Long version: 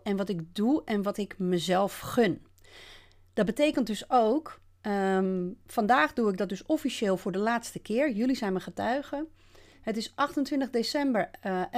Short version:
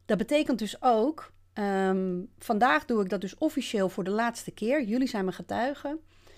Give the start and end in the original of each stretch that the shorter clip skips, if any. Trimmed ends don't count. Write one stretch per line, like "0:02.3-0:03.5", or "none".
none